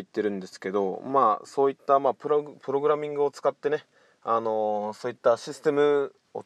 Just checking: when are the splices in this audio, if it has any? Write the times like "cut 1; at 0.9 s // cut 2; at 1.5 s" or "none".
none